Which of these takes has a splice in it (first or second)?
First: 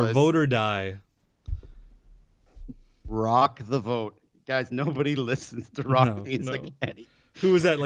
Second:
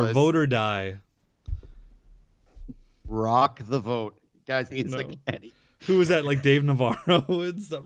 second